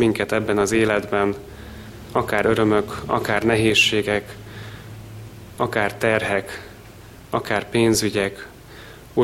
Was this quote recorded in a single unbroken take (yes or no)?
yes